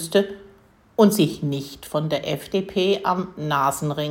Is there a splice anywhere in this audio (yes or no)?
no